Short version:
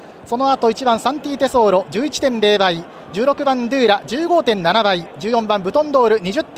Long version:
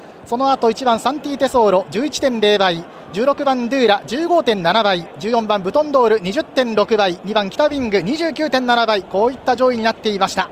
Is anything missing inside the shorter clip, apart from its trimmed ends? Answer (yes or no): no